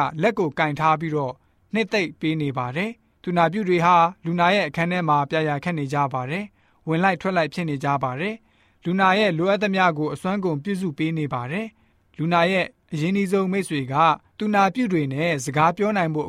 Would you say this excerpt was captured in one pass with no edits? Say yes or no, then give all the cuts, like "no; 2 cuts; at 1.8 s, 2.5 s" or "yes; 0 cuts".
yes; 0 cuts